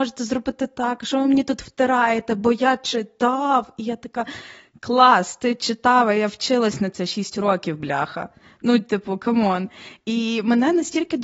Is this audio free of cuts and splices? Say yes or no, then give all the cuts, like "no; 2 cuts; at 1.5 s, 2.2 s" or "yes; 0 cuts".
yes; 0 cuts